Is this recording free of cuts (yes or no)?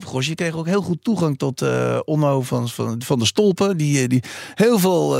yes